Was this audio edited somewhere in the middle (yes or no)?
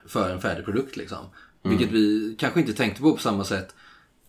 no